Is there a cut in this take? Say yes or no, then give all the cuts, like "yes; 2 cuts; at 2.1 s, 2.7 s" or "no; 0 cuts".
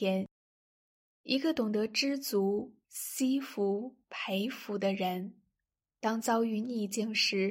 no; 0 cuts